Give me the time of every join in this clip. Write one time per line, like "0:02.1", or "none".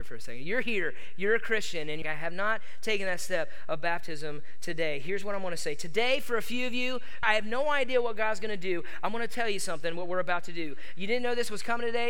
0:02.0
0:07.2